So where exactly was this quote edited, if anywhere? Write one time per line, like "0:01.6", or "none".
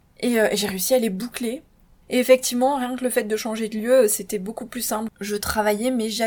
0:02.0